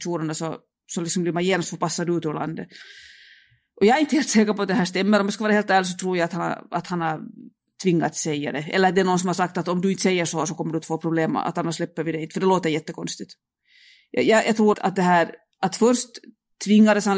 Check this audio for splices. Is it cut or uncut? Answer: cut